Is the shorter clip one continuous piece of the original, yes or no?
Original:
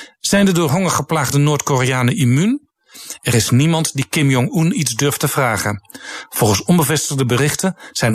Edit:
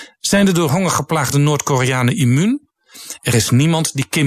yes